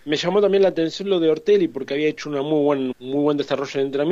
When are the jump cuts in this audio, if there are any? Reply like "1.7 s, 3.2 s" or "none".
2.9 s

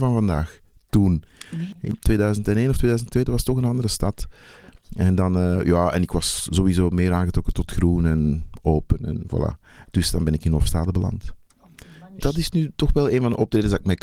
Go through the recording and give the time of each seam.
12.2 s

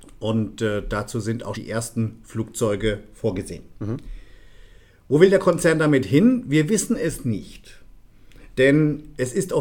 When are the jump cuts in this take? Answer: 1.5 s

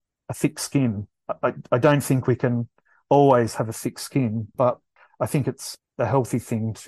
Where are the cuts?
4.5 s

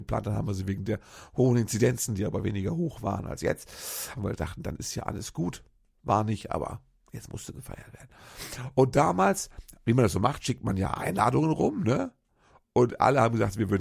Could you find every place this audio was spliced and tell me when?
4.1 s

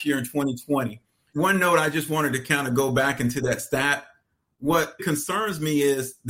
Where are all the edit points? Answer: 1.3 s, 5.0 s

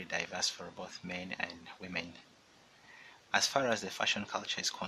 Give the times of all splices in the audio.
3.2 s

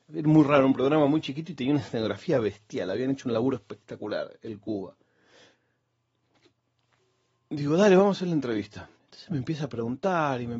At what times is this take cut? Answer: 8.9 s

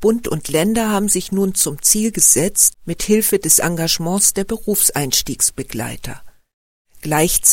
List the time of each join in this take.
2.7 s

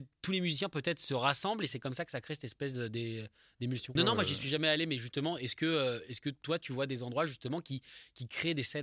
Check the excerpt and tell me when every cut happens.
4.0 s

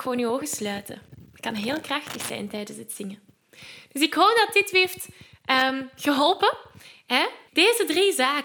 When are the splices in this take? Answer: 7.5 s

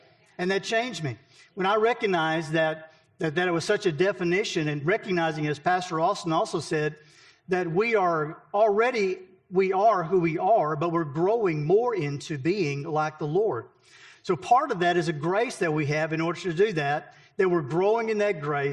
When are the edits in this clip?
none

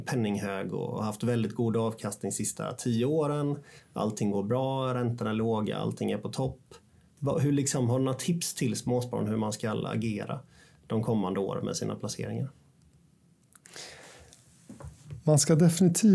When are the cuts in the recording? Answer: none

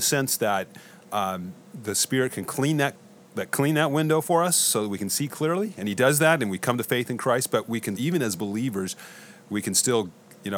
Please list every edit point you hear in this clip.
8.0 s

